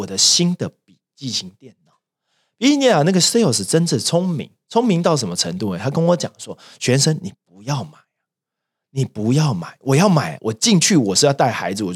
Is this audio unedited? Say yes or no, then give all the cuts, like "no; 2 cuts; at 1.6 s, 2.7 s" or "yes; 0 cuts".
yes; 0 cuts